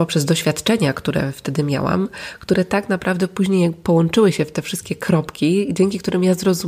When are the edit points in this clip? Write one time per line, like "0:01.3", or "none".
none

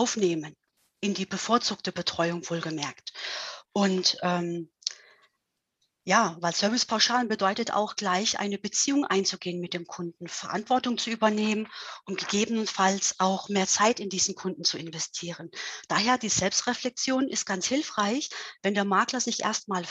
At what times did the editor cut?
none

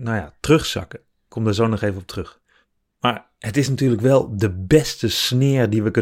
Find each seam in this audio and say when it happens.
none

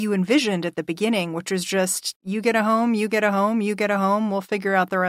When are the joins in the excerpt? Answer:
0:02.2

